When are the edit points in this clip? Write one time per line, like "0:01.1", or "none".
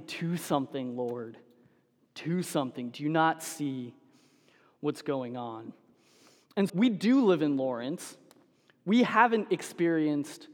0:06.7